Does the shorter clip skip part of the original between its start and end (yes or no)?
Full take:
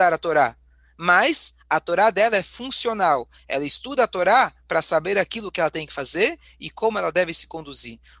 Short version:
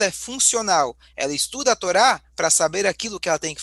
no